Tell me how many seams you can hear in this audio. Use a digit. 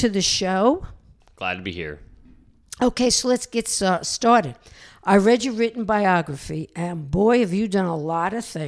0